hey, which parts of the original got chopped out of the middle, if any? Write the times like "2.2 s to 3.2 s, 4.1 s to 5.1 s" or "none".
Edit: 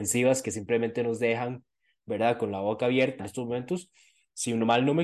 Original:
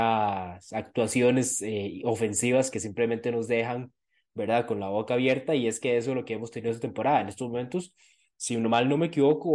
5.5 s to 7.2 s